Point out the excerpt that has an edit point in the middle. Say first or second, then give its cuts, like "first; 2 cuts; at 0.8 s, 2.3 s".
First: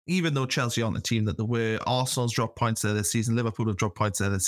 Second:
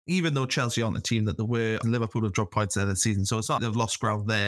second; 2 cuts; at 1.8 s, 3.6 s